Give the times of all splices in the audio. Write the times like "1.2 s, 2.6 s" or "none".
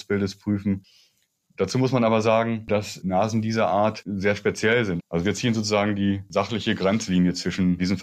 5.0 s